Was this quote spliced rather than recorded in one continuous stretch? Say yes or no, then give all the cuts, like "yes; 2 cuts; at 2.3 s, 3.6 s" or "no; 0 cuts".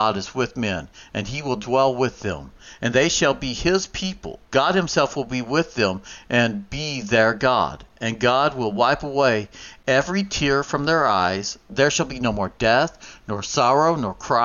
yes; 1 cut; at 4.4 s